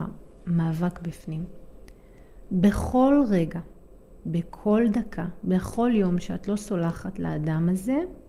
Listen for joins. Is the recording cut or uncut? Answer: uncut